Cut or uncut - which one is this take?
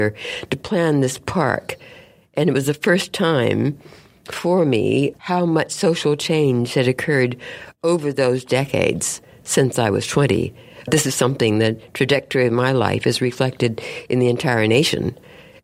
cut